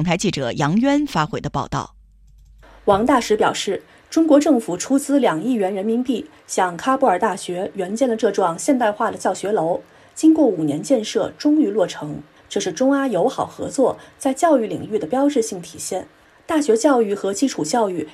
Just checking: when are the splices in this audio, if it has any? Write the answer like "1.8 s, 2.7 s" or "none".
none